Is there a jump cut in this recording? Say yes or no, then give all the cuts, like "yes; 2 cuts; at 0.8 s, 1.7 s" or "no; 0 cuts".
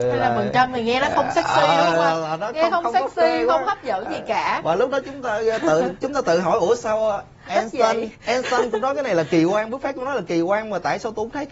no; 0 cuts